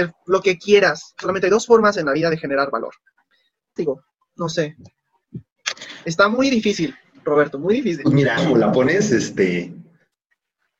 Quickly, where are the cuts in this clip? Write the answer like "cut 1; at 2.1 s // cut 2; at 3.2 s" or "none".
cut 1; at 3.8 s // cut 2; at 8.4 s